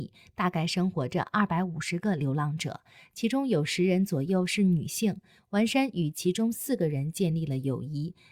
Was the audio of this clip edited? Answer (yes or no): no